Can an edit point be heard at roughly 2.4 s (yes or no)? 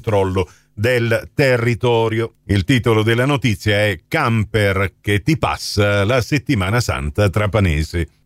yes